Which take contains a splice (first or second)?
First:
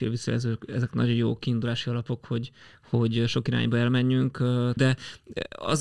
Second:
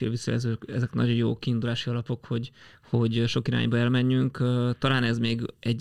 first